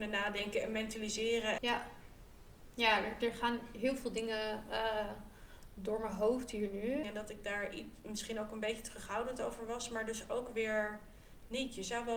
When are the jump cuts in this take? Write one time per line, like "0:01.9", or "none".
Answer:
0:01.6
0:07.0